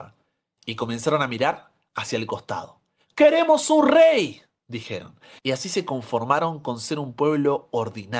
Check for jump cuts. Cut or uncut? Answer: cut